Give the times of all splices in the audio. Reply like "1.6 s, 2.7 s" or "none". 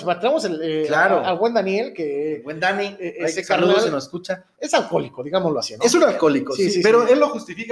4.5 s